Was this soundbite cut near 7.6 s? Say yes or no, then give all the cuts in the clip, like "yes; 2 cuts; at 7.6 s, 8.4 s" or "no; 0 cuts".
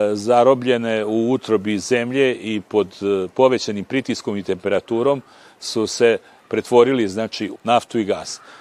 yes; 1 cut; at 7.6 s